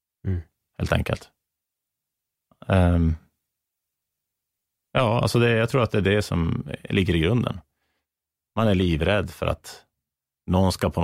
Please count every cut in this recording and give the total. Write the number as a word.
zero